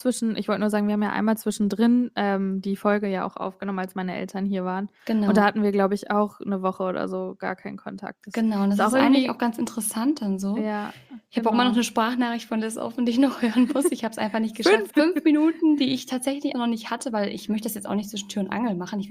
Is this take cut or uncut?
cut